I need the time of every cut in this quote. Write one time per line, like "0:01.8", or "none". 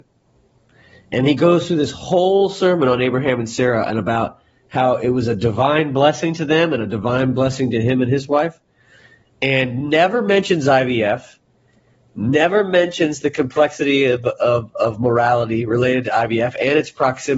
none

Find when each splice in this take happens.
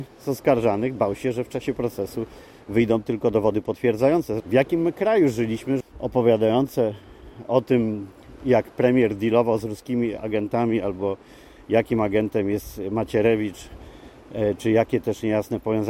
0:04.4
0:05.8

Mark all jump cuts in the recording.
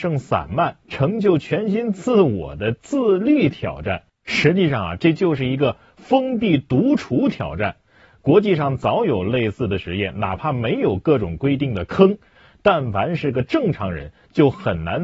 none

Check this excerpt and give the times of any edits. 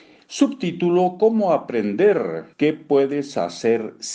0:02.5

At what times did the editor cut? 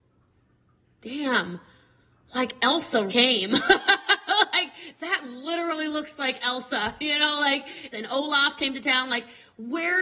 0:03.1
0:07.9

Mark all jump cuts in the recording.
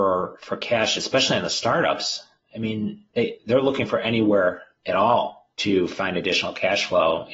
0:03.1
0:05.5

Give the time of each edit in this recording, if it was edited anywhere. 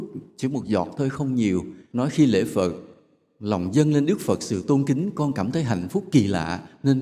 0:01.9

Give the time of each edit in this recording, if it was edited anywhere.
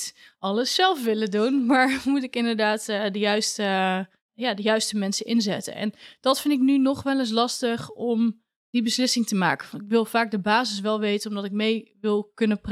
none

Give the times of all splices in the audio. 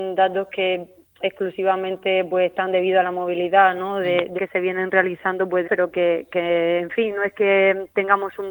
0:04.4
0:05.6

